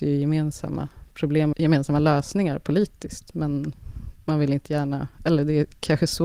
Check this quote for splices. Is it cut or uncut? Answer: cut